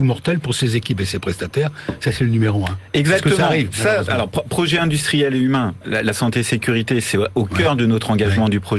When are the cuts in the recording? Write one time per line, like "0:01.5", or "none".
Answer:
none